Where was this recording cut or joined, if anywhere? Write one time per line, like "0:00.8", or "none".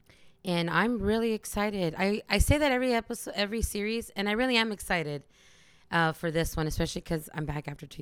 none